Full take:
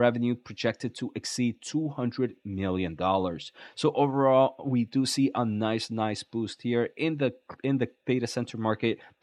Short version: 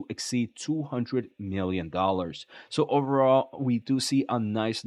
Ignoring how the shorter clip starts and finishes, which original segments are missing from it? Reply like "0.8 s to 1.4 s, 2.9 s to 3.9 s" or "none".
none